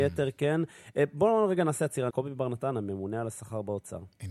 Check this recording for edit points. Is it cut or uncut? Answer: cut